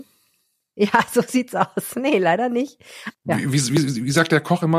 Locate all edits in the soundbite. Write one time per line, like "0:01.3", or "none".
0:03.1